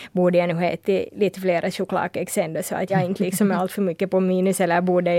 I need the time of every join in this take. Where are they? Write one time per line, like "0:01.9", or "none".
0:02.9